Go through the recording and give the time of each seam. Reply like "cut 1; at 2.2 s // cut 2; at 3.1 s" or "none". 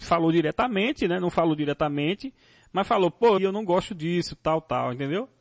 cut 1; at 3.4 s